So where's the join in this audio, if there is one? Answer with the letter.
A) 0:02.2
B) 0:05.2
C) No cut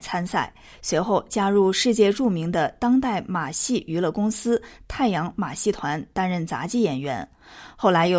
C